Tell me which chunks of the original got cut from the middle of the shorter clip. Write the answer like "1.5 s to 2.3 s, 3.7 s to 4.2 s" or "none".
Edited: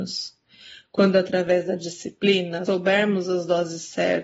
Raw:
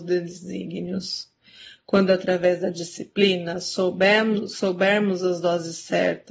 3.6 s to 4.6 s

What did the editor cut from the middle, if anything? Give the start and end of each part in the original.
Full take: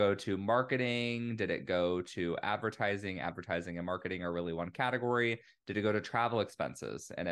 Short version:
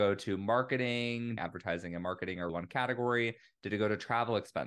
1.4 s to 3.2 s, 4.3 s to 4.5 s

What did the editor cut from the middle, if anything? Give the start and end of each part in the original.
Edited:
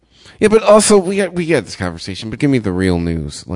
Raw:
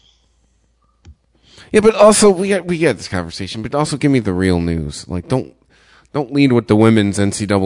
3.7 s to 4.0 s

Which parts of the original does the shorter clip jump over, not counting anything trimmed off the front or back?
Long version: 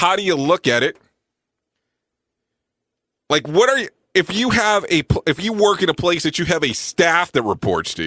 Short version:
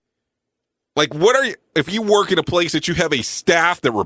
4.1 s to 5.2 s

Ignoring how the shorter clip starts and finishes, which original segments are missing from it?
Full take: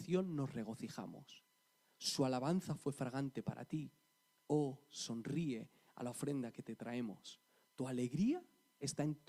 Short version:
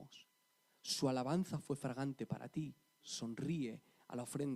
4.2 s to 4.9 s

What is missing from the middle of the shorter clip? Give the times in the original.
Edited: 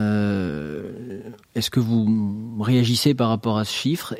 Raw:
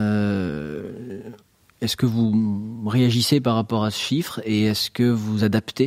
1.4 s to 1.7 s

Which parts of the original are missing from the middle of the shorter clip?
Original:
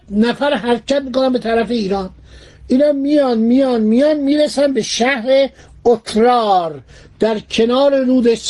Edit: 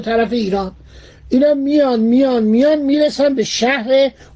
none

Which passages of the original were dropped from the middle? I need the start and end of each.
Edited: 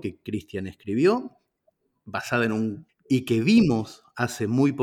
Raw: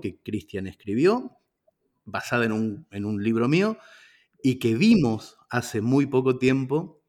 2.9 s to 4.2 s

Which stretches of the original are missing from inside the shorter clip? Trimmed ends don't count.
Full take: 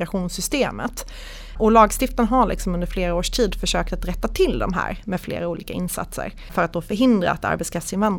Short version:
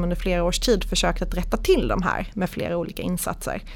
none

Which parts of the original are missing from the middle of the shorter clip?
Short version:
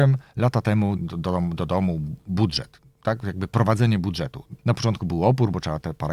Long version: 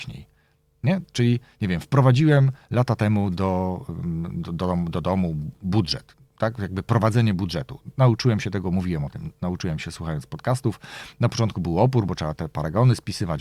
3.3 s to 4.3 s, 7.9 s to 11.1 s

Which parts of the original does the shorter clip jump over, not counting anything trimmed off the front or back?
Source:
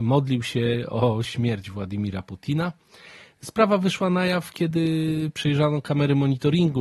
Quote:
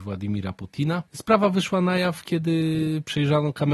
2.8 s to 3.4 s

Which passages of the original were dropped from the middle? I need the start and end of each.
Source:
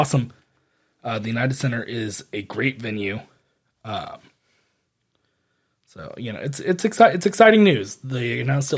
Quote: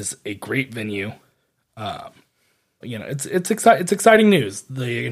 4.9 s to 6.1 s

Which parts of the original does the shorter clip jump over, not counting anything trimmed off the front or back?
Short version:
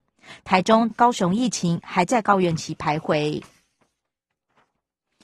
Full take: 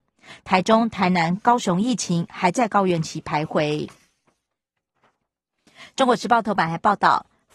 0.9 s to 1.4 s

